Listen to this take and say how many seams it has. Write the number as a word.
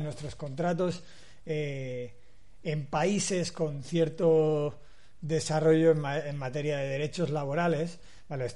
zero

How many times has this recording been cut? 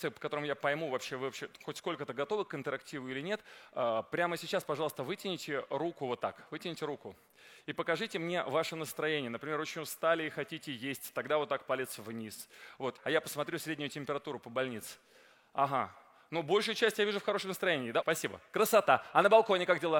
two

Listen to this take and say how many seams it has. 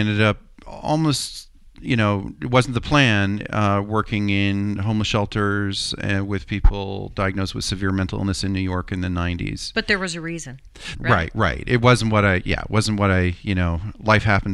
one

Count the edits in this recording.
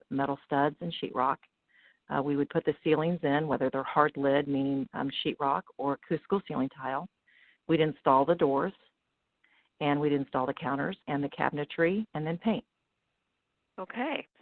two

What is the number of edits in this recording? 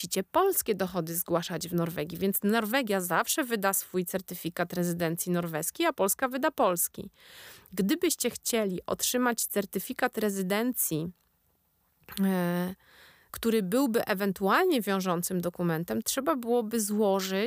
two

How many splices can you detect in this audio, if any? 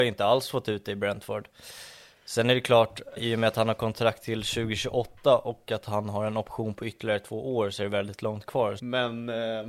two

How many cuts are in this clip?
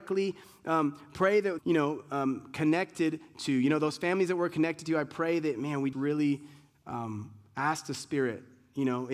two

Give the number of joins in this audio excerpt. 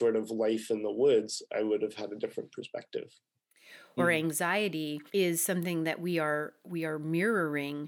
two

